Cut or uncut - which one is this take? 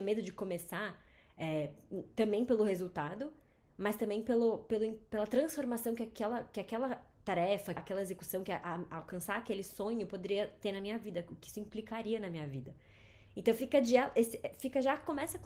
cut